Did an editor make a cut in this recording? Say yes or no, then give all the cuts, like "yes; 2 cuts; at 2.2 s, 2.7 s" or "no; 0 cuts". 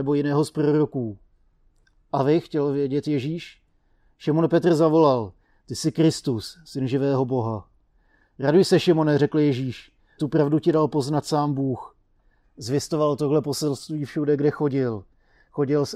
yes; 2 cuts; at 10.2 s, 12.4 s